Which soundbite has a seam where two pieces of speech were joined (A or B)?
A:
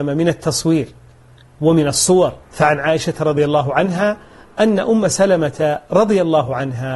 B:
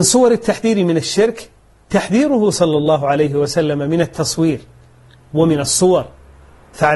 A